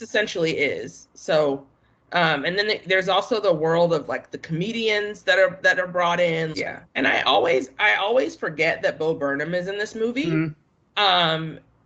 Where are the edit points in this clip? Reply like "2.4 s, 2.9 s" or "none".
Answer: 6.5 s